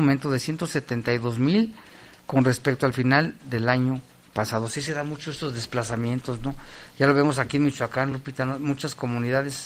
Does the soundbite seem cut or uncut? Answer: uncut